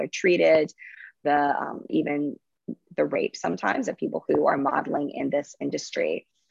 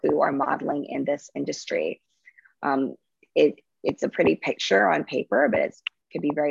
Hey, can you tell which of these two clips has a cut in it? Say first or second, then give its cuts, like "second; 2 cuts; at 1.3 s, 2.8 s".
first; 1 cut; at 1.9 s